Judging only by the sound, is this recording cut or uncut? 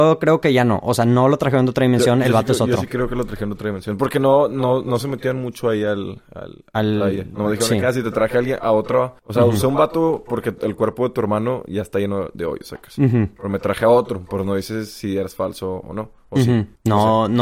uncut